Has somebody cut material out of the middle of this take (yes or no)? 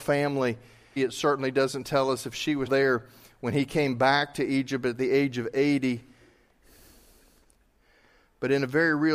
yes